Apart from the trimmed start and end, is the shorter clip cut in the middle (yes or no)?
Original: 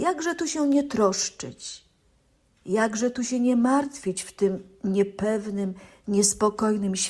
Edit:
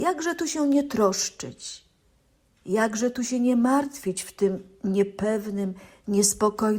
no